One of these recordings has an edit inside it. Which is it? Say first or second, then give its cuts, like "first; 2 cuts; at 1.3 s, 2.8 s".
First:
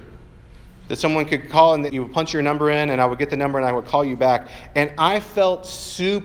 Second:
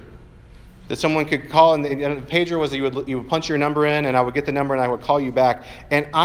first; 1 cut; at 1.9 s